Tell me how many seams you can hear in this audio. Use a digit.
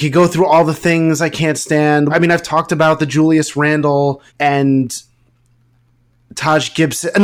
2